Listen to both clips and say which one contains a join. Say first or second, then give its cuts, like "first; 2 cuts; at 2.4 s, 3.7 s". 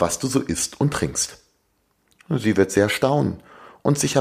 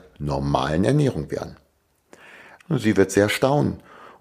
second; 1 cut; at 2.6 s